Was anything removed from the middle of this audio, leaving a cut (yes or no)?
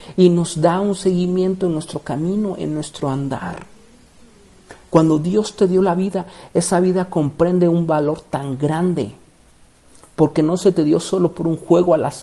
no